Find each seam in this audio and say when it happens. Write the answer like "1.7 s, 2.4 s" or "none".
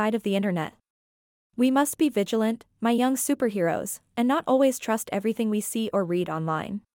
1.5 s

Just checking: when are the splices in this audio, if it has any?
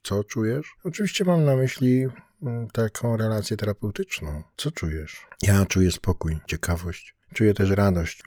none

